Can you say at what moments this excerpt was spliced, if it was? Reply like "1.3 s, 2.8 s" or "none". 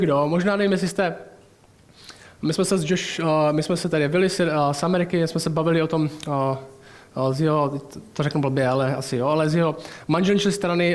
none